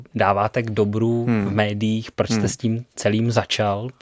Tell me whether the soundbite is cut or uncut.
uncut